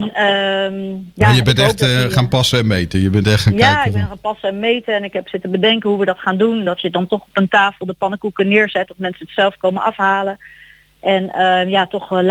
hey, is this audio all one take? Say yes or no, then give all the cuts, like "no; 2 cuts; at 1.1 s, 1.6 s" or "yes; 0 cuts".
yes; 0 cuts